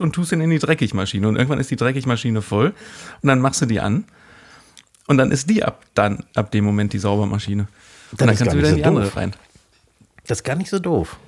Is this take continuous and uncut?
yes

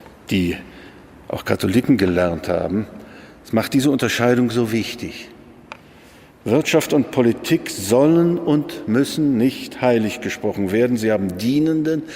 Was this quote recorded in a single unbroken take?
yes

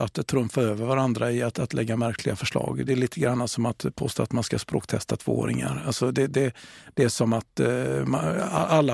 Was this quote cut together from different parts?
no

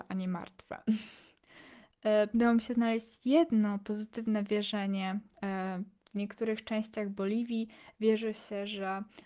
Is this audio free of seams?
no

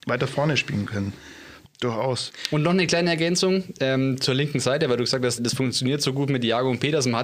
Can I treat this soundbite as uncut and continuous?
no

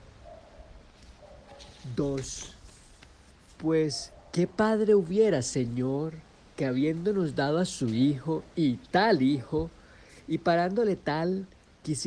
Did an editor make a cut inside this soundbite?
no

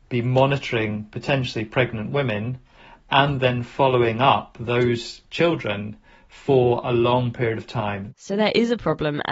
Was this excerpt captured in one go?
no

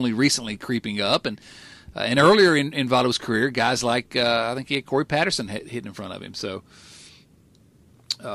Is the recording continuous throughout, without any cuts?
yes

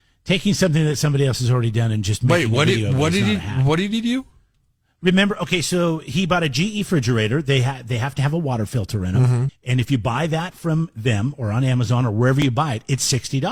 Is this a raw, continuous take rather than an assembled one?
no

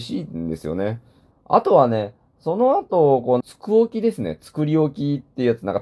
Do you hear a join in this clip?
yes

